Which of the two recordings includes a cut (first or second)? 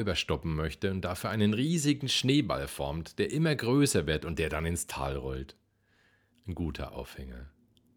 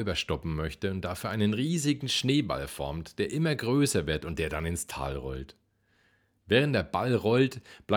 first